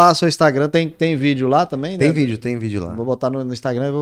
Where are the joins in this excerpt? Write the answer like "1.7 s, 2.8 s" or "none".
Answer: none